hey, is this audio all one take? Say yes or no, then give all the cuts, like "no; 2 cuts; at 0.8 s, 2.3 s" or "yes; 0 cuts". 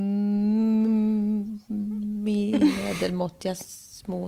yes; 0 cuts